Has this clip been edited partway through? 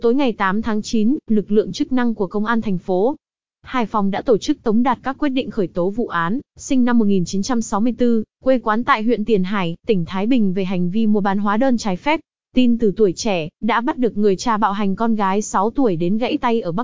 yes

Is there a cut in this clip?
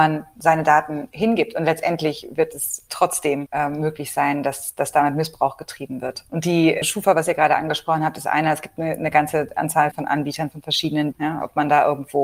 yes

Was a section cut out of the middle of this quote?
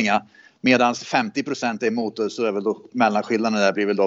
no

